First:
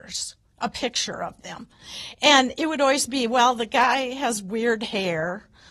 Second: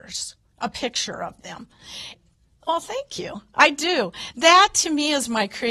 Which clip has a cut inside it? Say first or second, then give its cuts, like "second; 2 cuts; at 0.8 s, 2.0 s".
second; 1 cut; at 2.1 s